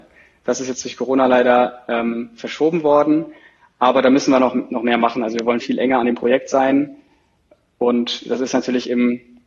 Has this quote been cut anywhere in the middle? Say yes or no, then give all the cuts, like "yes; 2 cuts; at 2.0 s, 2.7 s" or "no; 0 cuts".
yes; 1 cut; at 5.6 s